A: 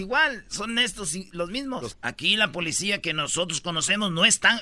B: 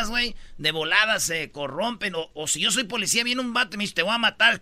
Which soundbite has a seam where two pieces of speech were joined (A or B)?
A